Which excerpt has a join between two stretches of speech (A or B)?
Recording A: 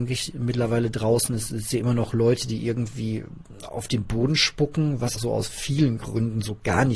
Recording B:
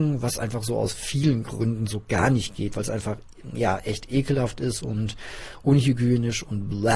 A